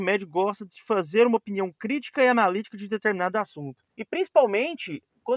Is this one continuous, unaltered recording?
no; 1 cut; at 3.9 s

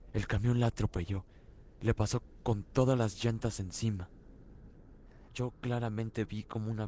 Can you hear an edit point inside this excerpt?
yes; 1 cut; at 5.3 s

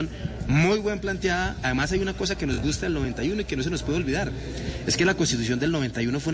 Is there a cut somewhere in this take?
no; 0 cuts

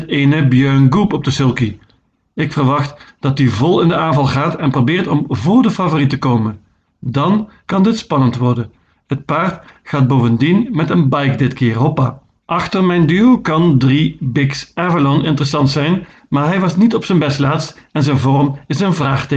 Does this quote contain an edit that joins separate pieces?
no; 0 cuts

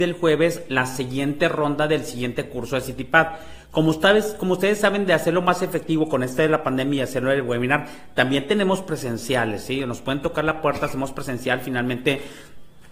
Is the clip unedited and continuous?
yes; 0 cuts

